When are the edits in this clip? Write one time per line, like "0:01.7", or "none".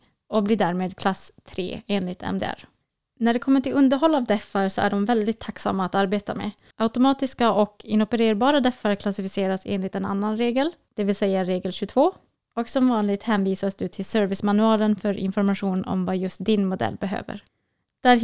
0:06.7
0:12.4